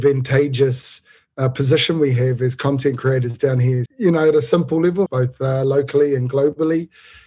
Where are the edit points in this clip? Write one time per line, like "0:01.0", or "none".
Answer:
0:03.9
0:05.1